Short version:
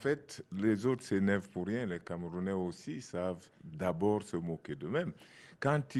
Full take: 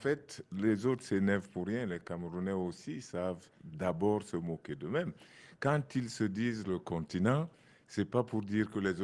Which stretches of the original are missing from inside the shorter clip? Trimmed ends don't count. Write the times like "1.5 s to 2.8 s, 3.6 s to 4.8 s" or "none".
none